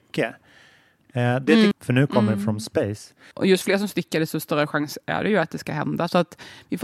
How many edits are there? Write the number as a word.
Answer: two